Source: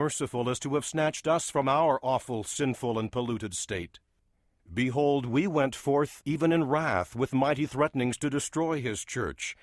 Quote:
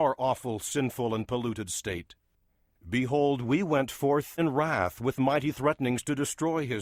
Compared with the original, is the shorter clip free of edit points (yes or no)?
no